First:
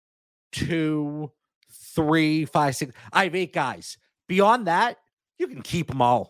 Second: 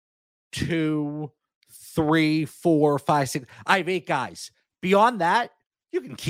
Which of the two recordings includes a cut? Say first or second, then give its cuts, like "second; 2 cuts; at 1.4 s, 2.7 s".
first; 1 cut; at 2.5 s